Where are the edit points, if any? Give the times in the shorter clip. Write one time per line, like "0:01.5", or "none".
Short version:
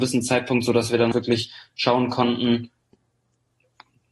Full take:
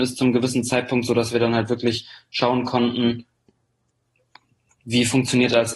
0:01.1